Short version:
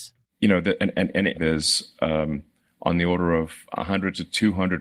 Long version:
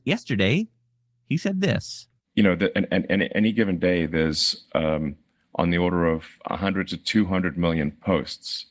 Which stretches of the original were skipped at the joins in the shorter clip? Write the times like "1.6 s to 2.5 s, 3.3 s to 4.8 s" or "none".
3.3 s to 4.1 s